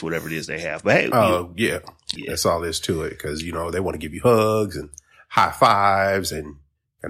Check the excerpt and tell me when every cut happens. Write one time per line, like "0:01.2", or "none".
0:02.2